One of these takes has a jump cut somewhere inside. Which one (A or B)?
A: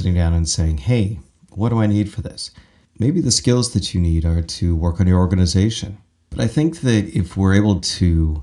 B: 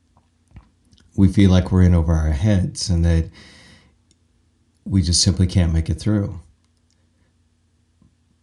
A